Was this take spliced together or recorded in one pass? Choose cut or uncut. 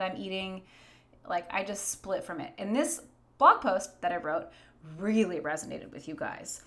uncut